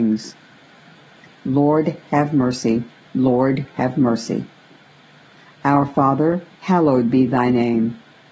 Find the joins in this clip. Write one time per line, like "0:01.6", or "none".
0:03.1
0:06.6